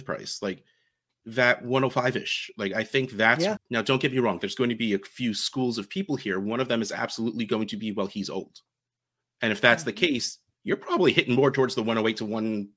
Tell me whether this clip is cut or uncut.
cut